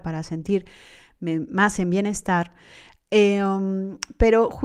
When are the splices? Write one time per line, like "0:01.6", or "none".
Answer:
none